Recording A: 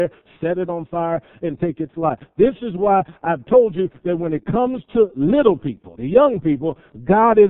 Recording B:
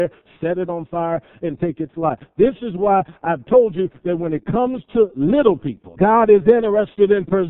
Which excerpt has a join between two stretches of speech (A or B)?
B